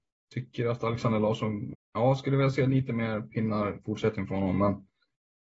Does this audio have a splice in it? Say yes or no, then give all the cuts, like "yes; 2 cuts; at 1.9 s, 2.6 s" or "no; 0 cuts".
yes; 1 cut; at 1.7 s